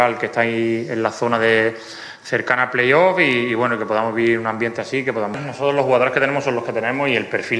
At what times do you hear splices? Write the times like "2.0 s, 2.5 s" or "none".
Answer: none